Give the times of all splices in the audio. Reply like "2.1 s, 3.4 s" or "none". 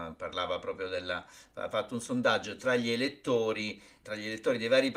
1.7 s, 4.0 s